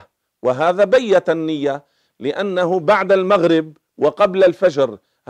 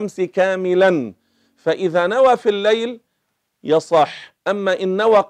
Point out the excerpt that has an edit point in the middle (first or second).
second